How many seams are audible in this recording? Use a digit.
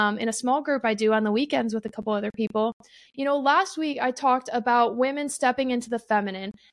1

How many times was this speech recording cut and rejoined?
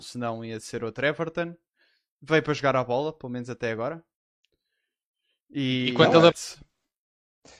1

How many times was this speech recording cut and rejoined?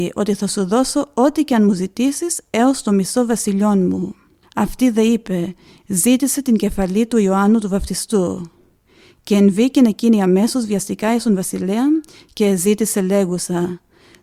1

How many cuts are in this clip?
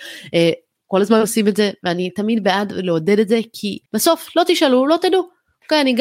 1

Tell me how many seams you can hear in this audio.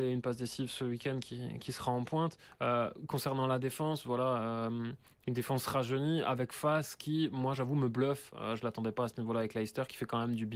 0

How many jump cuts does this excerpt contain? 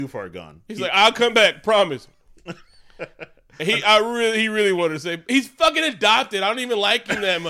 0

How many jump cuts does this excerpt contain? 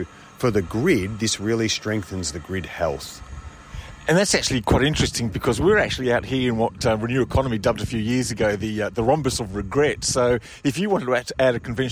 0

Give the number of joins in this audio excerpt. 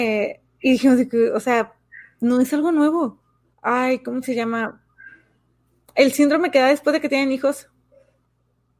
1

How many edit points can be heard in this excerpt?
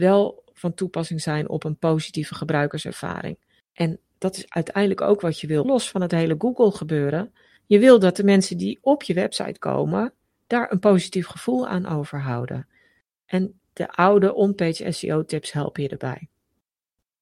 1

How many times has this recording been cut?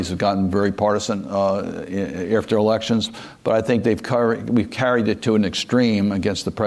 0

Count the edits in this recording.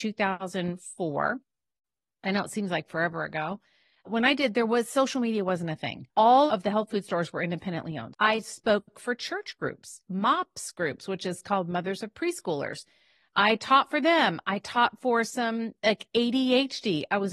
2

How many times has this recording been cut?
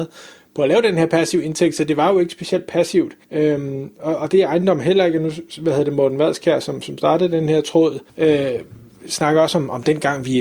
2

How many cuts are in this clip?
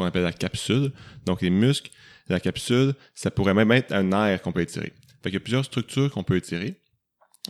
0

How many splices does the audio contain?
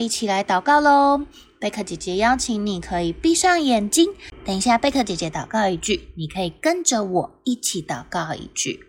0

